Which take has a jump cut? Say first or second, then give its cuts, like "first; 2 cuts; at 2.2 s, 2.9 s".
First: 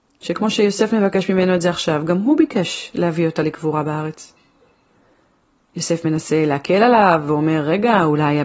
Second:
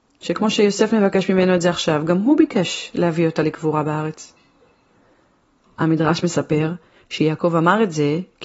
second; 1 cut; at 5.6 s